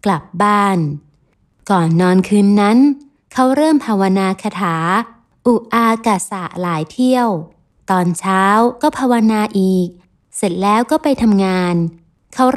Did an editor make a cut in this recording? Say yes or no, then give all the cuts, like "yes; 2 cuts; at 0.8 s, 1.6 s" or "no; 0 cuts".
no; 0 cuts